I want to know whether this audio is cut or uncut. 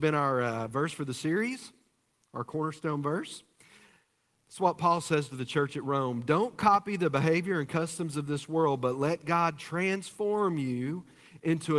uncut